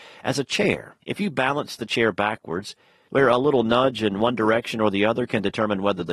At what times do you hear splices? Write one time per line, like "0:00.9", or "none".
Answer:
0:01.0
0:03.1